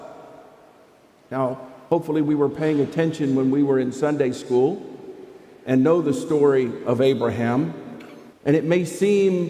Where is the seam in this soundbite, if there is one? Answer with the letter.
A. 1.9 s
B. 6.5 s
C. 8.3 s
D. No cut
C